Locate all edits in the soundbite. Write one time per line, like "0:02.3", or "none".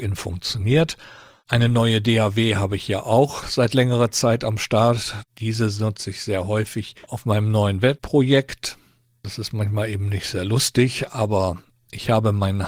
0:09.2